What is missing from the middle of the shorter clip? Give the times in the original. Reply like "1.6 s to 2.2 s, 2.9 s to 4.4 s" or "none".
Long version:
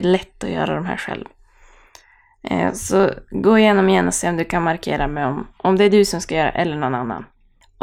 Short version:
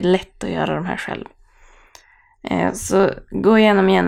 none